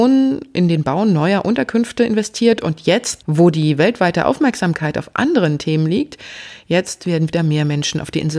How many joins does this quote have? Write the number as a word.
zero